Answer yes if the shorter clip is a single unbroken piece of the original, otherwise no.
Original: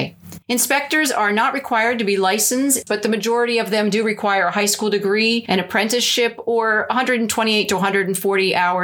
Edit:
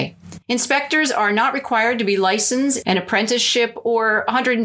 no